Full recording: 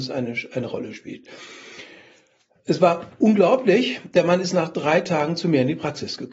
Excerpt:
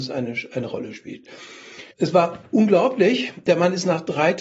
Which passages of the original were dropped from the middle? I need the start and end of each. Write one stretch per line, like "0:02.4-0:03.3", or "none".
0:01.9-0:02.6